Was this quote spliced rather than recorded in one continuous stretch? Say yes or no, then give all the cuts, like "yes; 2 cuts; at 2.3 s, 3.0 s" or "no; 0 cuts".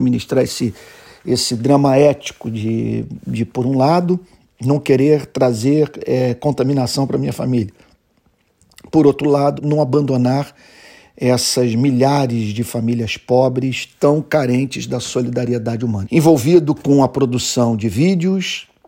yes; 2 cuts; at 9.6 s, 16.0 s